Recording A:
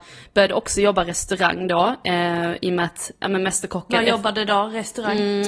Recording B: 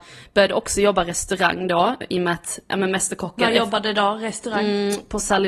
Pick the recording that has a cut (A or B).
B